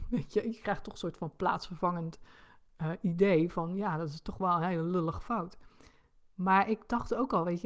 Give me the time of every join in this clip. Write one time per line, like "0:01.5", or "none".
none